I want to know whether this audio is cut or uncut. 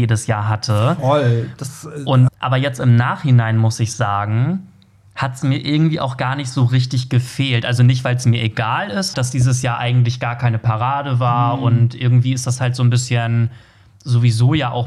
cut